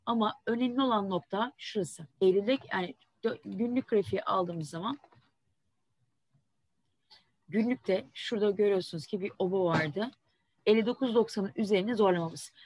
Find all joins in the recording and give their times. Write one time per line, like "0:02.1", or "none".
0:02.1
0:10.6

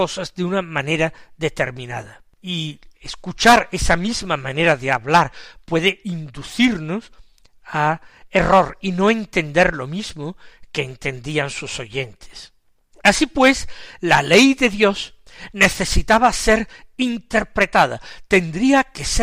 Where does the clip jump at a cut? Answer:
0:02.3
0:12.9

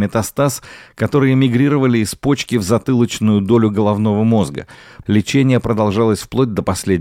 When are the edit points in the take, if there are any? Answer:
0:05.0

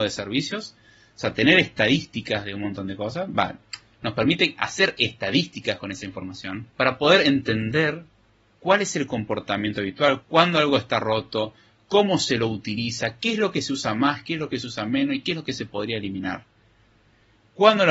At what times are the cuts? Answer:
0:06.7
0:10.2

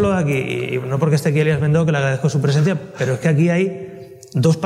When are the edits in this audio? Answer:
none

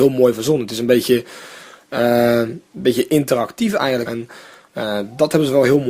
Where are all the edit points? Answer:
0:04.1

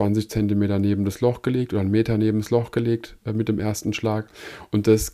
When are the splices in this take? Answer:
none

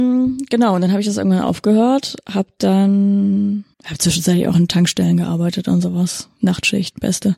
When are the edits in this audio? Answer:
0:03.7

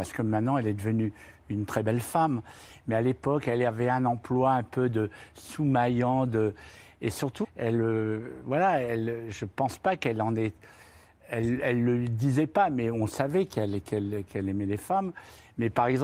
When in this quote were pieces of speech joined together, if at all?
0:07.4

